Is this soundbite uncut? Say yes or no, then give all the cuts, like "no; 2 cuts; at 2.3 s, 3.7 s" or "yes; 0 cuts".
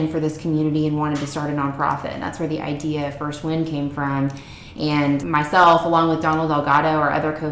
no; 1 cut; at 5.2 s